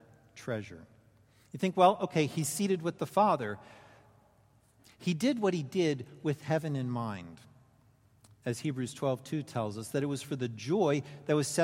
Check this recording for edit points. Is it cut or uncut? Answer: cut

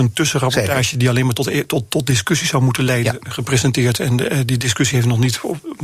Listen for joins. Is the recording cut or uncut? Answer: uncut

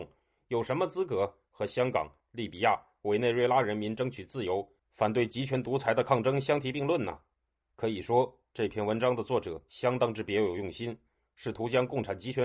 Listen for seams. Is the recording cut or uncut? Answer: uncut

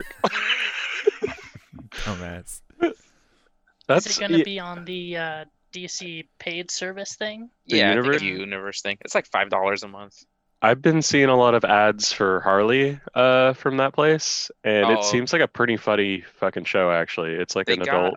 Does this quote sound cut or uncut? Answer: cut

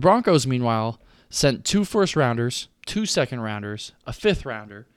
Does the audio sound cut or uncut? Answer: uncut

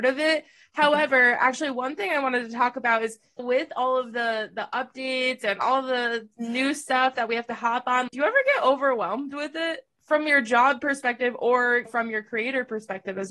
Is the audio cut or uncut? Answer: uncut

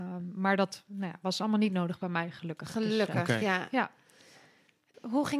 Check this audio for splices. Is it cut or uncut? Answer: uncut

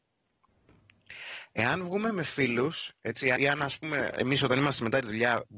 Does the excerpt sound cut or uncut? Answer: cut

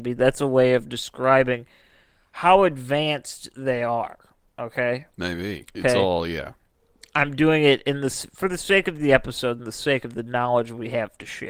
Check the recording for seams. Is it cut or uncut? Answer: cut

